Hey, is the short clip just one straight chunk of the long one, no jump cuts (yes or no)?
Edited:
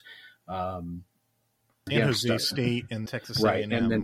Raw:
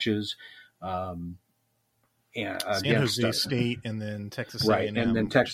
no